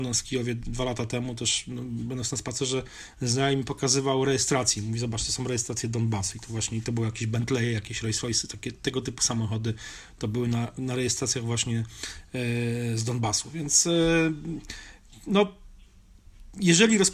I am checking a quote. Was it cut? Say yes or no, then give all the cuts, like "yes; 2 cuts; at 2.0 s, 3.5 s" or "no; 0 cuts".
no; 0 cuts